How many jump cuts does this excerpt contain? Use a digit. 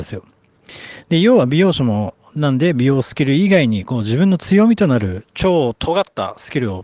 1